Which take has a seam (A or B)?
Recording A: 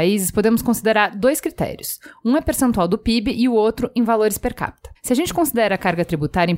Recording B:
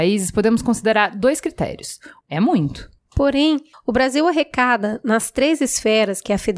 B